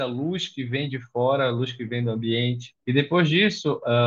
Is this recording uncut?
no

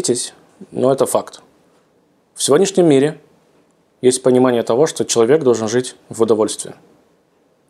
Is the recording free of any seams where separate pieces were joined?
yes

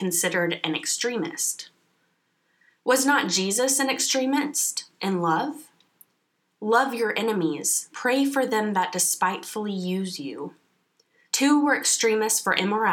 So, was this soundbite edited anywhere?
yes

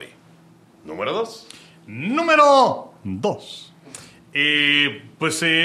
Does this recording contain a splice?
no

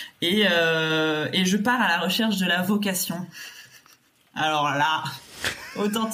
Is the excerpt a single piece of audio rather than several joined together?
yes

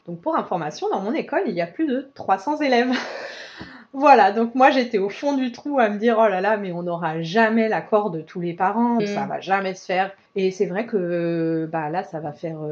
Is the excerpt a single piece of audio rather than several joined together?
no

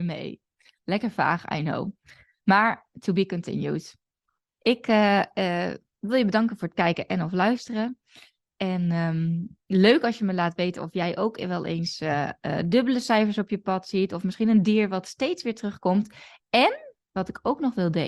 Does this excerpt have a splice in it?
no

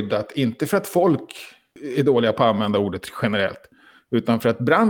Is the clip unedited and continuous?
yes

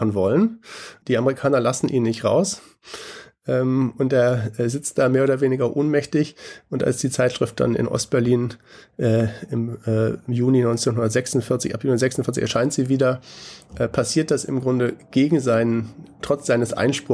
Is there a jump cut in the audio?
yes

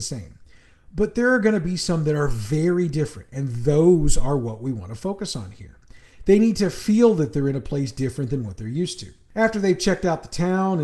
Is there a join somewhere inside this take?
no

